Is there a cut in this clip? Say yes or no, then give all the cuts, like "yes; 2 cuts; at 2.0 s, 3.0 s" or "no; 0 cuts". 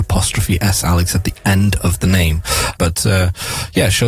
yes; 1 cut; at 2.7 s